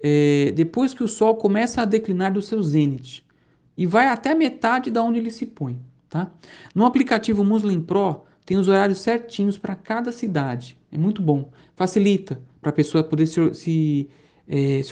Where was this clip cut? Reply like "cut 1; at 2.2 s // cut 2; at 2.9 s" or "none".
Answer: cut 1; at 6.1 s